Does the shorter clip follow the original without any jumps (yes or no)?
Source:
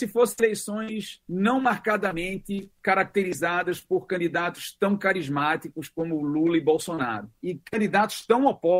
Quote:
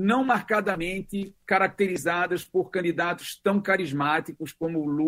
yes